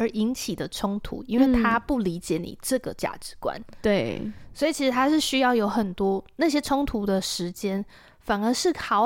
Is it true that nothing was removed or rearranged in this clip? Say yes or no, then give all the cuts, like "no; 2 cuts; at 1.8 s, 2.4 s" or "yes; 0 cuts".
yes; 0 cuts